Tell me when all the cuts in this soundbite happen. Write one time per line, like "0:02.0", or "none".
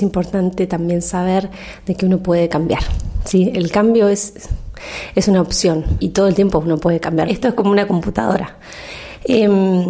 0:06.0
0:07.3